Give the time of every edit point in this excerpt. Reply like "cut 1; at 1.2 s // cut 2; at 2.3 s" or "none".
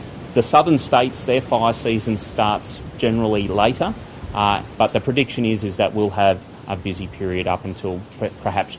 cut 1; at 4.8 s // cut 2; at 6.8 s

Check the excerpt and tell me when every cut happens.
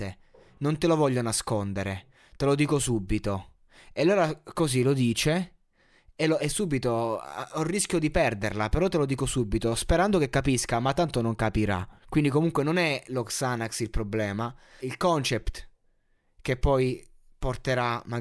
cut 1; at 6.4 s // cut 2; at 12.0 s // cut 3; at 14.8 s

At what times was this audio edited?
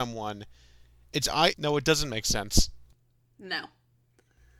cut 1; at 1.5 s

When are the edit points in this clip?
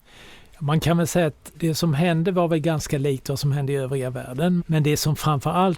cut 1; at 1.5 s // cut 2; at 4.6 s

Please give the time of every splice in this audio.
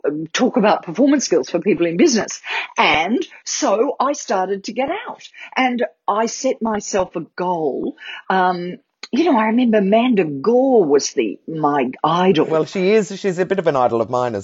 none

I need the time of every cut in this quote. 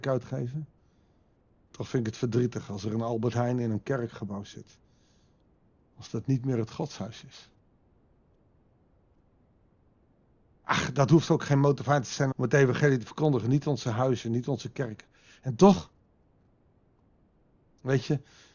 cut 1; at 12.3 s

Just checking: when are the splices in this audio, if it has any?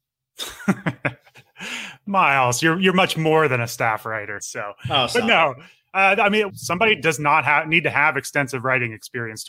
cut 1; at 4.4 s // cut 2; at 6.5 s

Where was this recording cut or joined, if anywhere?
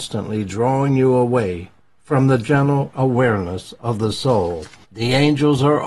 cut 1; at 4.8 s

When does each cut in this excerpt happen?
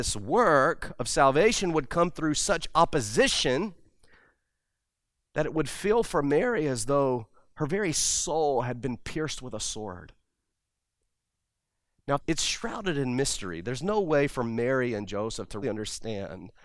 cut 1; at 12.2 s // cut 2; at 15.6 s

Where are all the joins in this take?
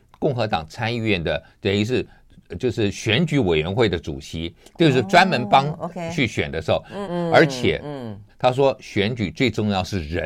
cut 1; at 7.0 s // cut 2; at 8.3 s

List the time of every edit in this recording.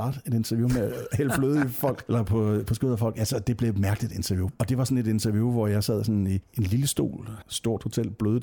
cut 1; at 4.5 s // cut 2; at 7.4 s

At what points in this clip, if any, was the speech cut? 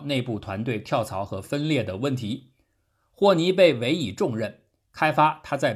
none

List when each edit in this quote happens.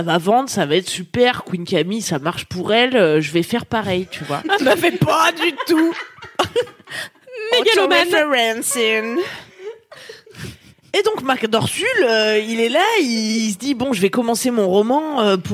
none

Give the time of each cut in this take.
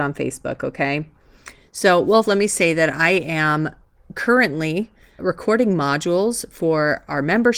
cut 1; at 2.3 s // cut 2; at 5.2 s

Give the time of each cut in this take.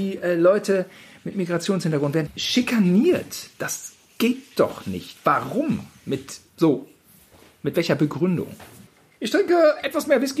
none

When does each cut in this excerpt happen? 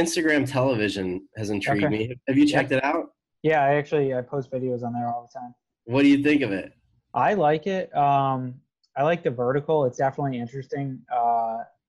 none

